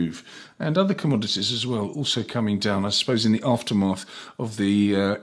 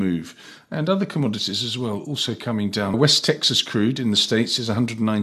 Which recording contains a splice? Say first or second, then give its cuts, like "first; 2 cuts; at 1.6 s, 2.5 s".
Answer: second; 1 cut; at 2.9 s